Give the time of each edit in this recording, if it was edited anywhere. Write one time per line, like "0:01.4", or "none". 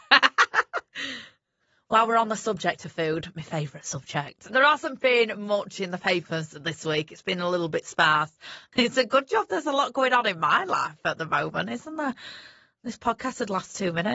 0:04.5